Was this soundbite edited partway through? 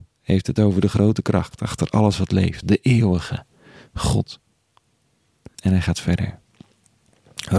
yes; 2 cuts; at 2.6 s, 5.5 s

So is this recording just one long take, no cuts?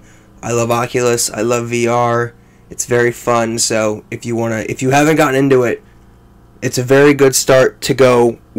yes; 0 cuts

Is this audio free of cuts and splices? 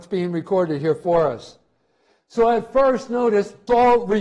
yes; 0 cuts

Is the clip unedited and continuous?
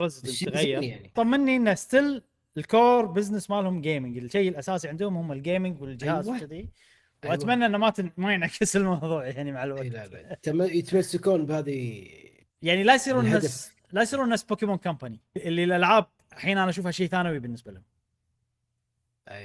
no; 2 cuts; at 1.2 s, 15.4 s

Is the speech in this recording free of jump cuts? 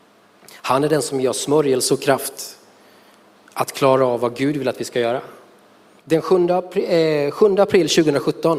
no; 1 cut; at 6.0 s

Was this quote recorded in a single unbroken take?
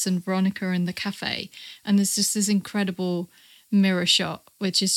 yes; 0 cuts

